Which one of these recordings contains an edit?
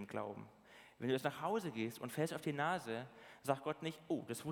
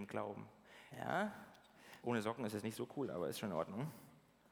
second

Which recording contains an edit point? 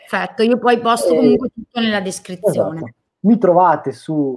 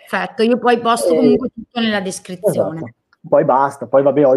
first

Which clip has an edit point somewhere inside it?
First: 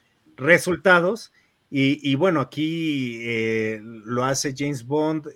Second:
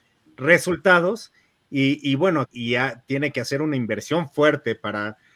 second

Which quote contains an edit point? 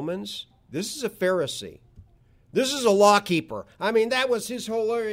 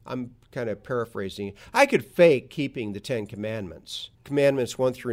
second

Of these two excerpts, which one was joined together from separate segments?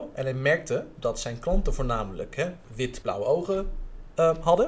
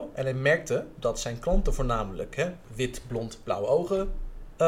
first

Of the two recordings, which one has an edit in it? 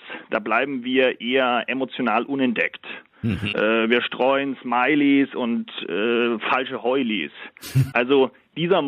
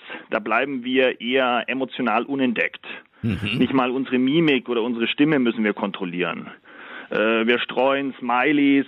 first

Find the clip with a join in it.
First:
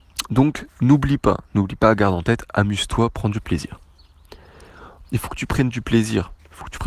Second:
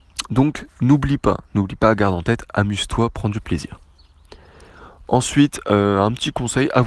first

